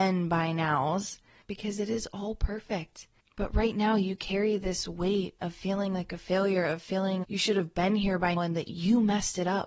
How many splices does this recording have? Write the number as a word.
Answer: three